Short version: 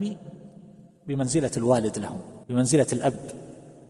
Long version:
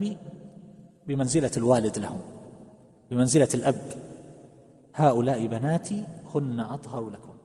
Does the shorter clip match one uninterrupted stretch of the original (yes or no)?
no